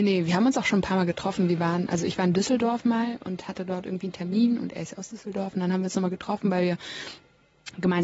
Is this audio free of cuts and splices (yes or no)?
yes